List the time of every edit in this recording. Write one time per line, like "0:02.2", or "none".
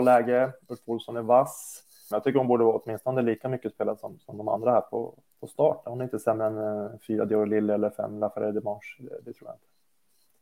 0:02.1